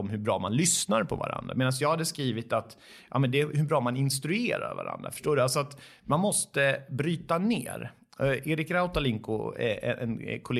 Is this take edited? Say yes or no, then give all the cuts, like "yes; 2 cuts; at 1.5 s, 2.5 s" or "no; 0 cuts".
no; 0 cuts